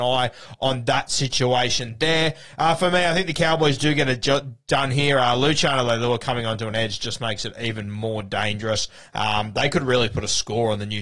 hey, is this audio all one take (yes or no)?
yes